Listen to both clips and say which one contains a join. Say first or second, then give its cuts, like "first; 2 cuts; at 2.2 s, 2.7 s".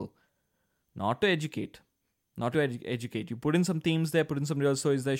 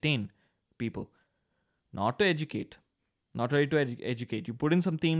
first; 1 cut; at 2.5 s